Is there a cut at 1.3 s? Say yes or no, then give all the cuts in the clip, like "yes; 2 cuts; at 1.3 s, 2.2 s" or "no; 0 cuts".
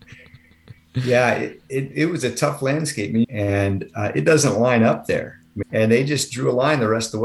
no; 2 cuts; at 3.2 s, 5.6 s